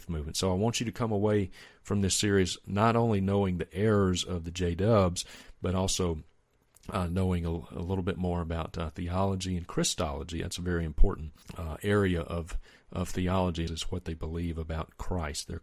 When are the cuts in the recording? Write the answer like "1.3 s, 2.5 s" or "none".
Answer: 11.4 s, 13.7 s